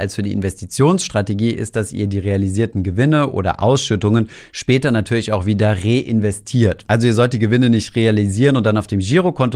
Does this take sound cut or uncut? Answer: uncut